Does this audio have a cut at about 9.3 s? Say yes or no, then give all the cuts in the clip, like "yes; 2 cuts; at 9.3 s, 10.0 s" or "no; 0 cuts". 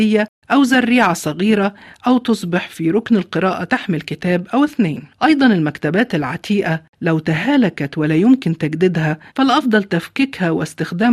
yes; 2 cuts; at 5.1 s, 9.3 s